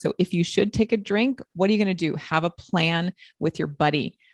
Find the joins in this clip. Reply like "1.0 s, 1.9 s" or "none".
none